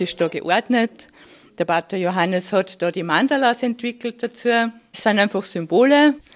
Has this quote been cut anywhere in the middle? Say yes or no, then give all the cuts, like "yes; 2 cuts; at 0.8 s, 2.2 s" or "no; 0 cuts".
no; 0 cuts